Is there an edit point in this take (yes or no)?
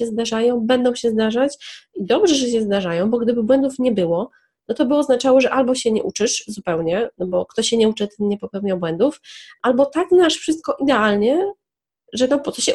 no